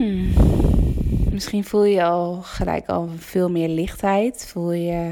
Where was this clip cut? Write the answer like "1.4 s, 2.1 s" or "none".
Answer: none